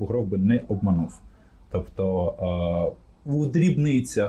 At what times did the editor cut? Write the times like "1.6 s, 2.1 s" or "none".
none